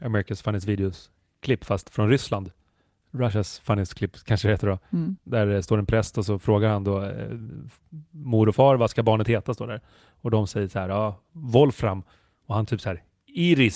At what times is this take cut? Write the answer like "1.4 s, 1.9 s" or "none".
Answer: none